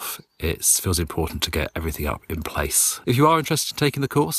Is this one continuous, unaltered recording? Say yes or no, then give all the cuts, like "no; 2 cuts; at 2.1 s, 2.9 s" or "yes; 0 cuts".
no; 1 cut; at 3.0 s